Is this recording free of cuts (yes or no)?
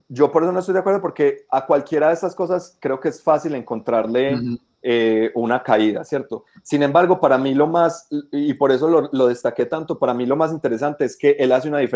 yes